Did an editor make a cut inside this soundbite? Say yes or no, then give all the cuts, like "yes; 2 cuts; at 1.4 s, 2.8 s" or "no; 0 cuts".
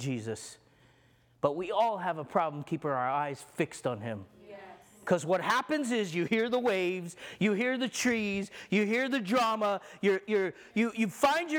no; 0 cuts